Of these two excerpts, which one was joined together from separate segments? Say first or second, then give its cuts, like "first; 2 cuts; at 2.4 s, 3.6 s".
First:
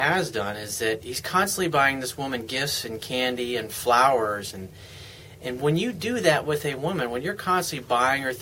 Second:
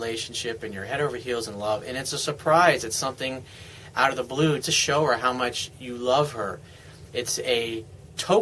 second; 1 cut; at 4.6 s